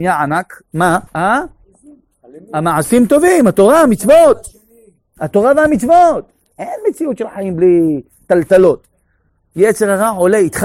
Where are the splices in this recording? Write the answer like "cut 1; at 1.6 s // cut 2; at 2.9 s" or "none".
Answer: cut 1; at 1.1 s // cut 2; at 6.5 s